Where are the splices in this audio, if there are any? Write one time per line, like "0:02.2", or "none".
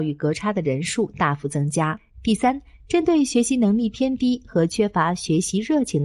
0:02.1